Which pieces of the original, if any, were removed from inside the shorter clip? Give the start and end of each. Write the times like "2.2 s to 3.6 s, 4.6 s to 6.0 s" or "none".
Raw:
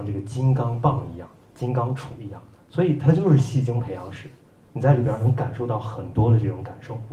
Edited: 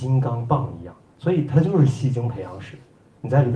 1.4 s to 2.6 s